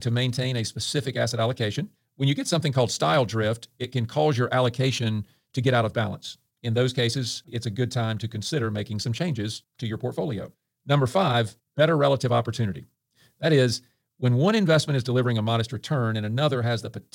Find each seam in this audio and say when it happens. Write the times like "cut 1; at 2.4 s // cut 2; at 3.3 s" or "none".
none